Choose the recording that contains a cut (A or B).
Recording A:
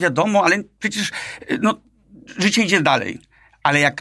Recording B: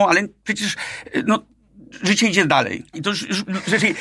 B